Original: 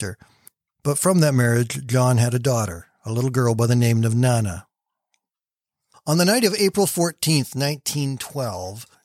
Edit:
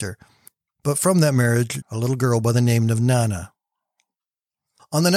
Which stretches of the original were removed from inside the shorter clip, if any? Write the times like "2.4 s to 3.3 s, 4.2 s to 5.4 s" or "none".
1.8 s to 3.0 s